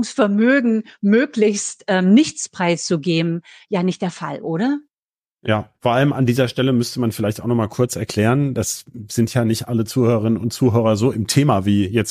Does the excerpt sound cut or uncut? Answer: cut